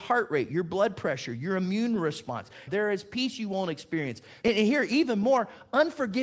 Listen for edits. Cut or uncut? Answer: cut